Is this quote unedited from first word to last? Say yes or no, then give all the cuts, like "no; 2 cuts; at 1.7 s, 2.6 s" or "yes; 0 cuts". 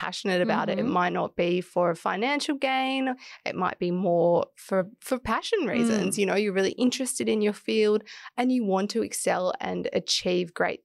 yes; 0 cuts